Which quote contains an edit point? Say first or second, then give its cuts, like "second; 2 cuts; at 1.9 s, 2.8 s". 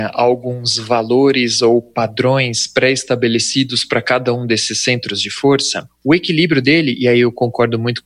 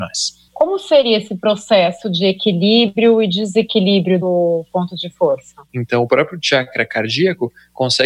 second; 1 cut; at 5.7 s